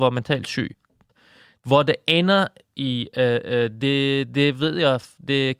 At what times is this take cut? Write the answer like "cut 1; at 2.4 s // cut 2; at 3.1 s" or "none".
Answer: none